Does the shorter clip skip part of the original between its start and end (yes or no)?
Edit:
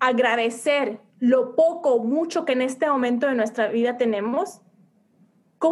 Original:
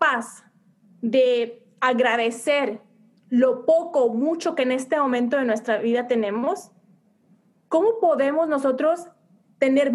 yes